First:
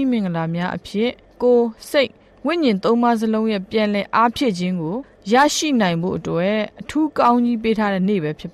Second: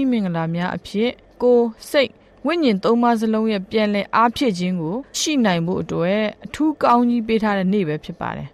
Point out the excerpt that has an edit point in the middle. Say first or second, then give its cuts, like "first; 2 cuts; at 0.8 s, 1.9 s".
second; 1 cut; at 5.1 s